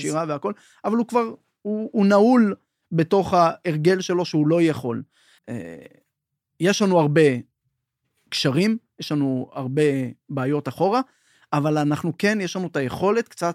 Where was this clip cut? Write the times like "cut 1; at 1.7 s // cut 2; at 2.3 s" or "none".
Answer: cut 1; at 5.4 s